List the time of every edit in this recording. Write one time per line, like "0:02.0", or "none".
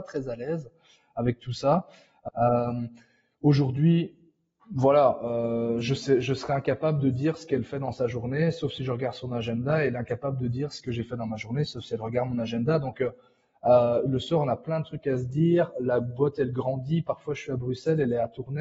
0:02.3